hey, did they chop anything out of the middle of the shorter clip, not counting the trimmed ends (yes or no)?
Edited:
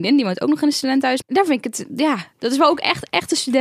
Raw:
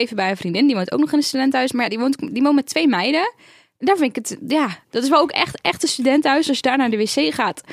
yes